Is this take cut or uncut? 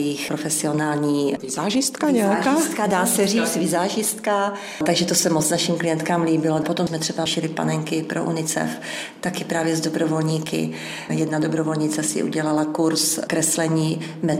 cut